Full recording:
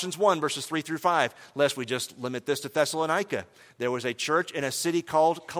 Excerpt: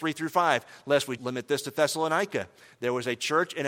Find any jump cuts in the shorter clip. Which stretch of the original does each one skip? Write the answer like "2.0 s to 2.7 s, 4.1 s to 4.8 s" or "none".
1.9 s to 2.1 s

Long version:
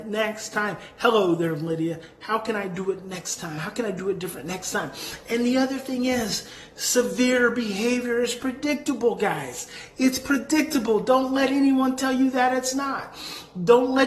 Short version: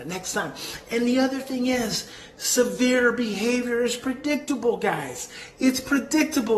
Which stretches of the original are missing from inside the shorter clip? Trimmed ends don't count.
none

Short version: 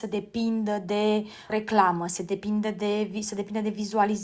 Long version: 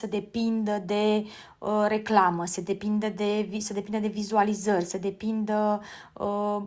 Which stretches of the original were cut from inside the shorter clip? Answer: 1.5 s to 1.9 s

